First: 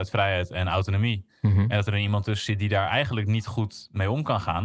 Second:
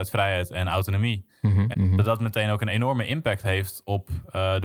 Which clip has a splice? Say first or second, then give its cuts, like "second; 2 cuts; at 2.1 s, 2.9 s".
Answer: second; 1 cut; at 1.7 s